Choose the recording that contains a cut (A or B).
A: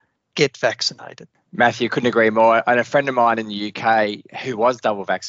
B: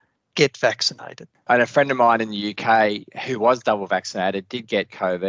B